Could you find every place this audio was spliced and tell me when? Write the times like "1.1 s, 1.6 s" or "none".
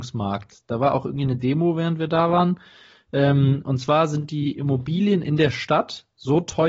none